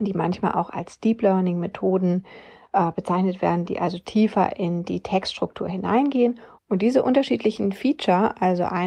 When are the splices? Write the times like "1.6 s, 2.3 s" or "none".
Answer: 6.6 s